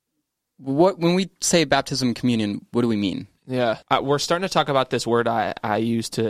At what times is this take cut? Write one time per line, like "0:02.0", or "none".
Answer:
0:03.8

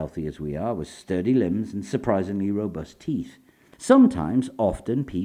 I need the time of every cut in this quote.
0:03.7

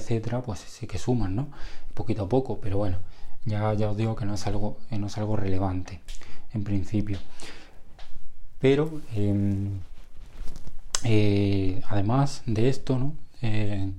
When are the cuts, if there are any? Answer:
none

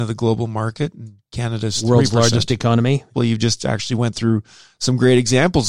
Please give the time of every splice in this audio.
0:03.1

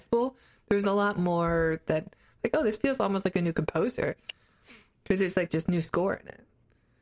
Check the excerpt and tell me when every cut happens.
0:05.5

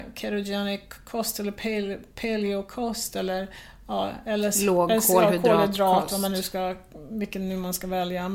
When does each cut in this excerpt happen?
none

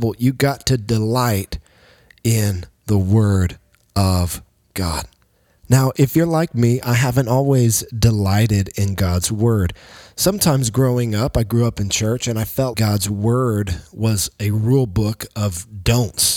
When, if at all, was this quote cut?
0:12.7

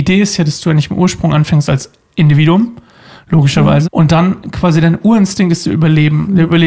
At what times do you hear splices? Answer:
0:03.8

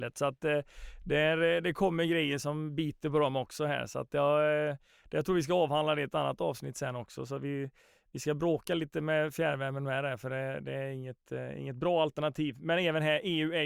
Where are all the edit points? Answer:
none

